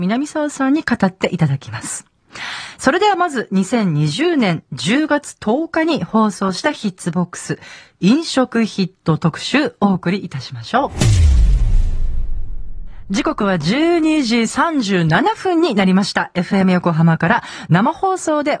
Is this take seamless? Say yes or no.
yes